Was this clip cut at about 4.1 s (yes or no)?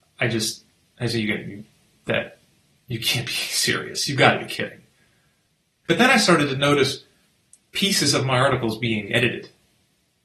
no